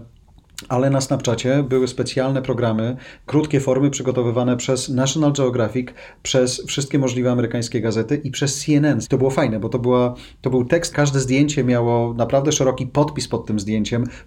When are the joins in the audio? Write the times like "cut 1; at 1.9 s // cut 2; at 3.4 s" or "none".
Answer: cut 1; at 3.3 s // cut 2; at 9.0 s // cut 3; at 10.9 s